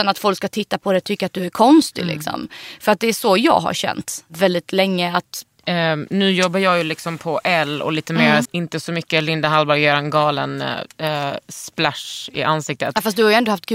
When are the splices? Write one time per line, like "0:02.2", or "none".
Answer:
0:05.6
0:08.5